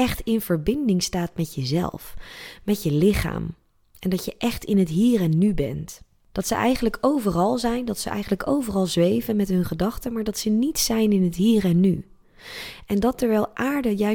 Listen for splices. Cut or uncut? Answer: cut